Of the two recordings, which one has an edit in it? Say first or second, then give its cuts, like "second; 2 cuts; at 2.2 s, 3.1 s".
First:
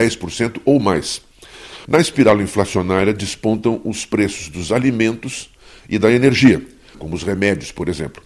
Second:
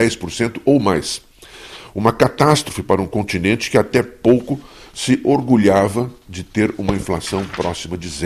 first; 2 cuts; at 1.8 s, 6.9 s